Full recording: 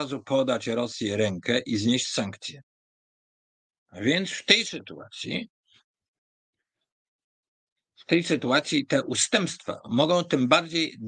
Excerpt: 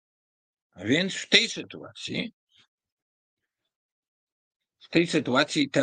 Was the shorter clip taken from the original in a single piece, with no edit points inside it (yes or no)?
yes